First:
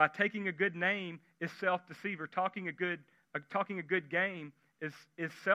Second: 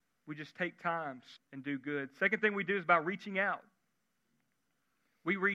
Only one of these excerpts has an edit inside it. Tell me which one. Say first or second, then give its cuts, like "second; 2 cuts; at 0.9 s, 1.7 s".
second; 1 cut; at 1.4 s